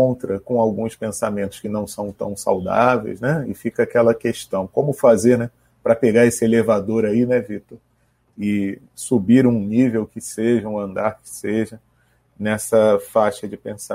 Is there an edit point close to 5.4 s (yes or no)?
no